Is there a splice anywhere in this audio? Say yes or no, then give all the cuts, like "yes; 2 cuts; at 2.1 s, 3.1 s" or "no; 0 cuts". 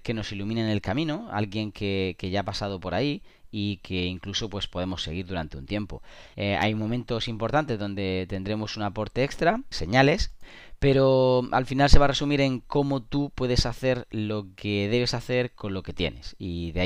yes; 2 cuts; at 6.3 s, 9.7 s